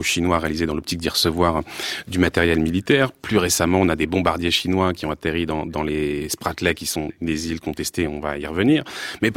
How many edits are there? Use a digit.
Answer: 0